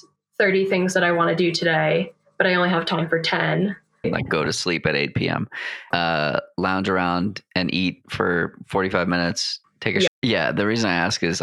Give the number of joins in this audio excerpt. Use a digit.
3